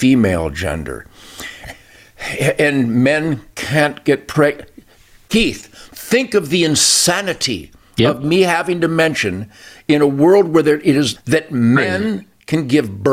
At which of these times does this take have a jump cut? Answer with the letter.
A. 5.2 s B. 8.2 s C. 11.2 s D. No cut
C